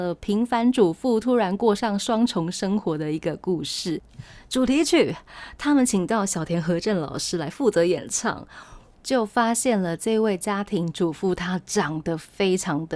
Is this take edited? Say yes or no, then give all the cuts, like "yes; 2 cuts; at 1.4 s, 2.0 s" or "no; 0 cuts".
yes; 1 cut; at 8.9 s